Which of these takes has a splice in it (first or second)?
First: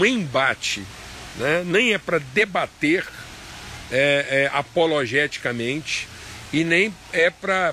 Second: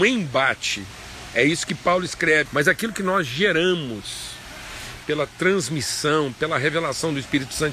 second